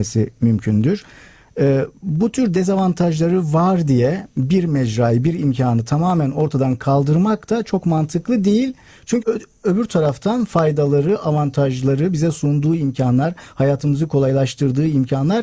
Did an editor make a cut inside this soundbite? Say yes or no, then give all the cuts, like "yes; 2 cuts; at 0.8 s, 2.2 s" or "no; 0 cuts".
yes; 1 cut; at 9.2 s